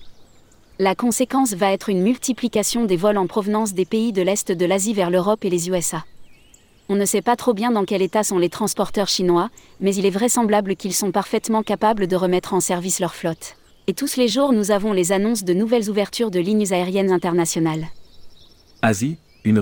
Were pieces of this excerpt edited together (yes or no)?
yes